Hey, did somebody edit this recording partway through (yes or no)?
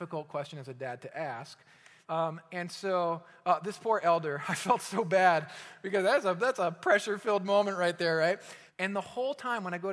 yes